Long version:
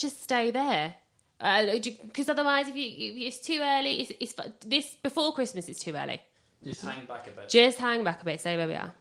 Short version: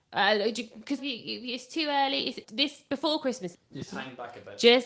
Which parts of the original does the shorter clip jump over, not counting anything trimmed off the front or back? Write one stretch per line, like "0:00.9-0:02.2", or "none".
0:02.3-0:02.7
0:04.2-0:04.6
0:05.7-0:06.4